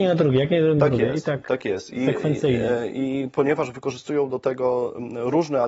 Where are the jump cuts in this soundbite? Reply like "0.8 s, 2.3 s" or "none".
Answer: none